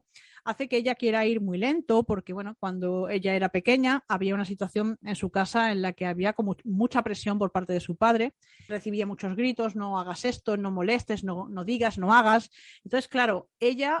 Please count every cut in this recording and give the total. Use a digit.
2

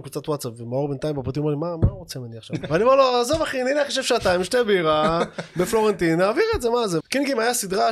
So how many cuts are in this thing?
2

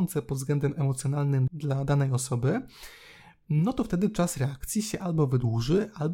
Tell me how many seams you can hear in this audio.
1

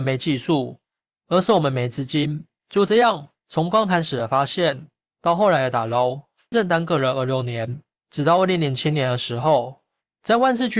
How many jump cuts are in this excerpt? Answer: 1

